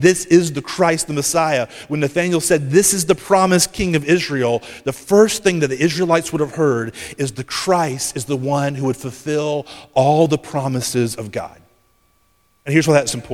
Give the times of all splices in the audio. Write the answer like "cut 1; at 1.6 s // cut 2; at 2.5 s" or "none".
none